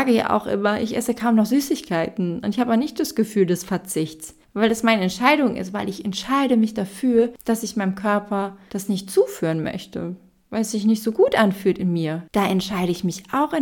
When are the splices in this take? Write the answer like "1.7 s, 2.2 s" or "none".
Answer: 12.3 s